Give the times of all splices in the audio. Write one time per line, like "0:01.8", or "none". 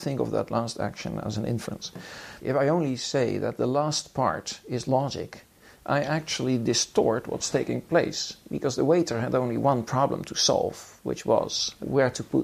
0:02.4